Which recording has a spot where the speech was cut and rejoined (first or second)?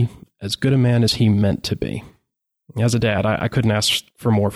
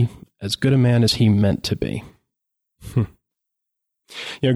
first